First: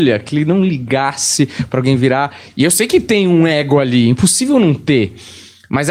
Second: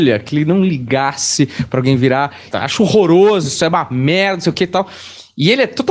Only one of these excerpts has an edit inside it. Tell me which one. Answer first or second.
second